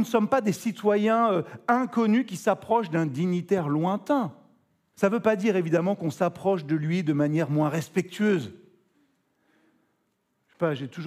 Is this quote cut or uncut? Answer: cut